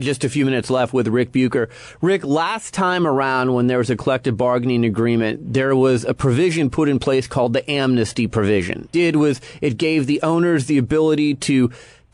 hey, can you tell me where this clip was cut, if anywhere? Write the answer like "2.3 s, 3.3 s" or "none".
8.9 s